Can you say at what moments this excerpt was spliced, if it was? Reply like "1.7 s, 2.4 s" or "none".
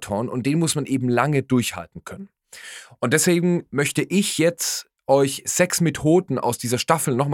none